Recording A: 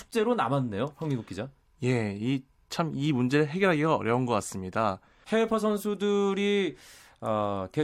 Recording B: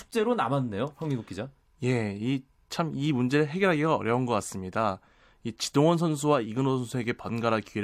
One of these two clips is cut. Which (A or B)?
A